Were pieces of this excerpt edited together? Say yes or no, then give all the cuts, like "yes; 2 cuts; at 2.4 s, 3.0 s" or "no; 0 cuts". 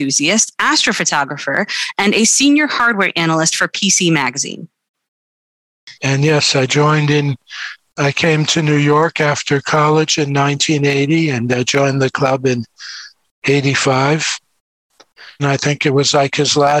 yes; 2 cuts; at 5.9 s, 15.4 s